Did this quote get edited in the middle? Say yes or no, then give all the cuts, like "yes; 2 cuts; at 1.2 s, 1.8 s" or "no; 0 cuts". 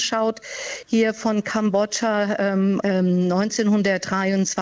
yes; 1 cut; at 2.8 s